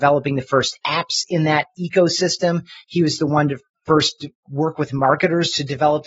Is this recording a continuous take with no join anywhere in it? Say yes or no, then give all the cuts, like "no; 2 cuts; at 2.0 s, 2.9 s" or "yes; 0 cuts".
yes; 0 cuts